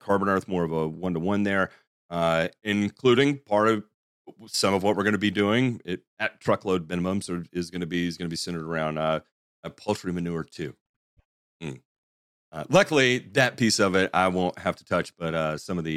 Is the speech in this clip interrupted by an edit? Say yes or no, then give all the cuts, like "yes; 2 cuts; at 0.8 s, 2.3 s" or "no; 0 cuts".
no; 0 cuts